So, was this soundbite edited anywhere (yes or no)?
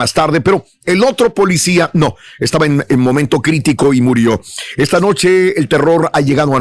no